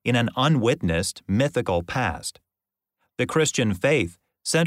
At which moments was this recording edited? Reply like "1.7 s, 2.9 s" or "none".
none